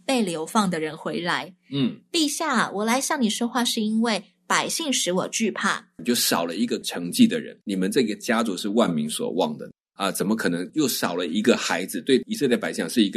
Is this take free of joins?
no; 2 cuts; at 6.0 s, 7.6 s

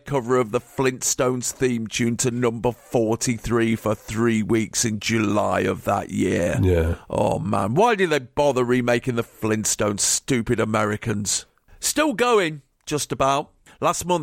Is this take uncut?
yes; 0 cuts

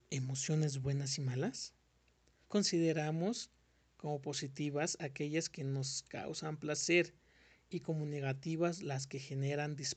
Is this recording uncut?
no; 1 cut; at 2.4 s

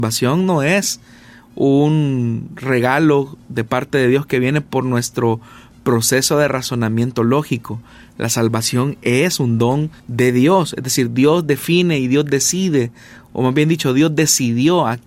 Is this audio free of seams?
no; 1 cut; at 10.0 s

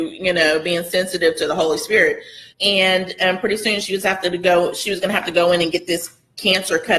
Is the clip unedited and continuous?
no; 1 cut; at 2.5 s

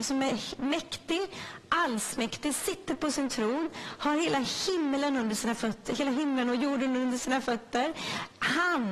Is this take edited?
no; 0 cuts

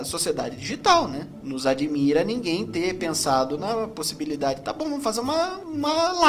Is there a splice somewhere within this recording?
no; 0 cuts

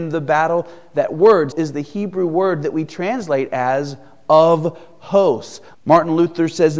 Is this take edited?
yes; 2 cuts; at 1.5 s, 5.7 s

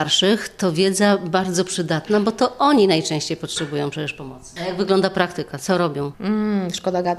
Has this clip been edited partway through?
no; 0 cuts

